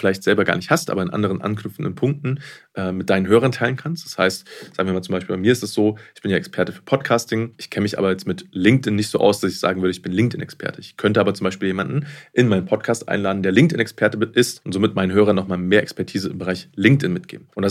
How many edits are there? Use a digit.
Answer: 0